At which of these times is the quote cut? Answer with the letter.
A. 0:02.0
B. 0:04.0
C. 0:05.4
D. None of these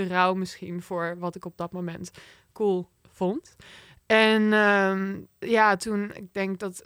C